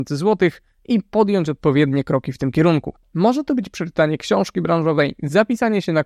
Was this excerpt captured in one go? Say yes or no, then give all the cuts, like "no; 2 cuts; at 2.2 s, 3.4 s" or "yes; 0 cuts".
yes; 0 cuts